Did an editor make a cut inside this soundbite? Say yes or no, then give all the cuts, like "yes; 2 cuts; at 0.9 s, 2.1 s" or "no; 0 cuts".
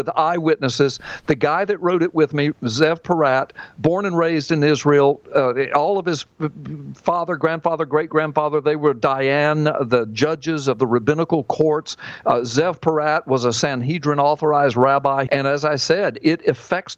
yes; 2 cuts; at 5.3 s, 15.3 s